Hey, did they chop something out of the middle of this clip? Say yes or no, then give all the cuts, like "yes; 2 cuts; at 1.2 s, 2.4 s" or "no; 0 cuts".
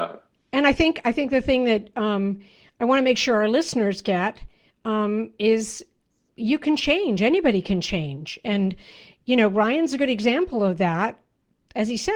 yes; 1 cut; at 6.3 s